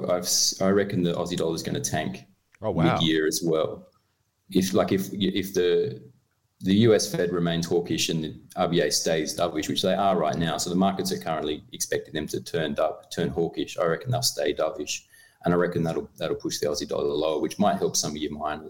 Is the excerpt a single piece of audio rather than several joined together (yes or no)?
yes